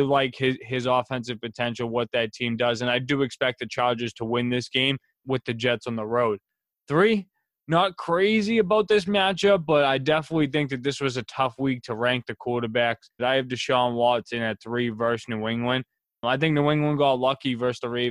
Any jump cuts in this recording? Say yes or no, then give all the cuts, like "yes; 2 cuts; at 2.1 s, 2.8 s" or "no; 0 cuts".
yes; 1 cut; at 13.2 s